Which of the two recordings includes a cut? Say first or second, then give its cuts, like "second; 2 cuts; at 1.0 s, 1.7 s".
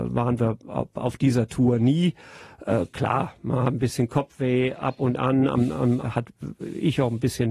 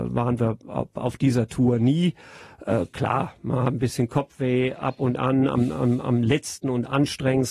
first; 1 cut; at 6.0 s